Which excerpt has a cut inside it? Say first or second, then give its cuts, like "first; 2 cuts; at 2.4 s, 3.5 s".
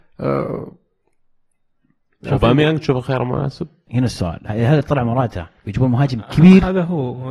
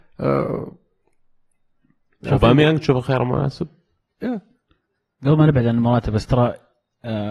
first; 1 cut; at 3.9 s